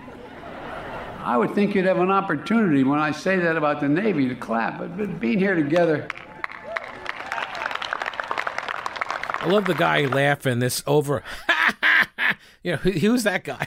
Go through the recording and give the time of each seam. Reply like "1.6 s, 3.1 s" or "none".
none